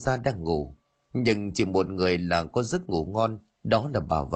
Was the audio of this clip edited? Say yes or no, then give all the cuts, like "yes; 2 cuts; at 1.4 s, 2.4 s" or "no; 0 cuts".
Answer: no; 0 cuts